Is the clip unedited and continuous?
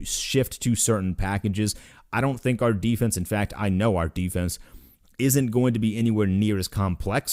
yes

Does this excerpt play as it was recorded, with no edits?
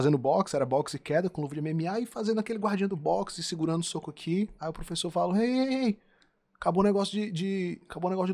yes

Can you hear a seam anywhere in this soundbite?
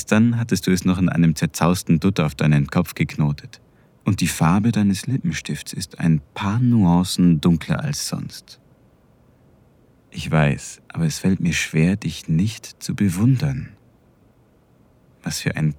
yes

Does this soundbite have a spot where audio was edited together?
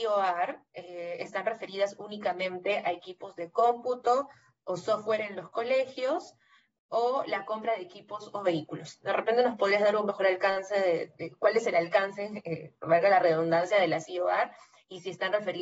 no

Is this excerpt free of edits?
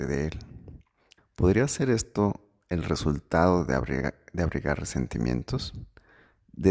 no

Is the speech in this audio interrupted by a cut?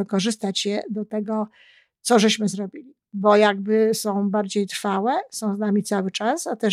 yes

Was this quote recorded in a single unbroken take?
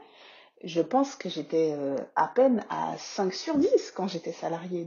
yes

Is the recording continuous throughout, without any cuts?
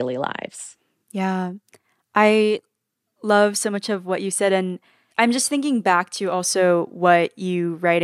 yes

